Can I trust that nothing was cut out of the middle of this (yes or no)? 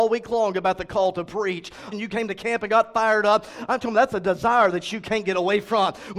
no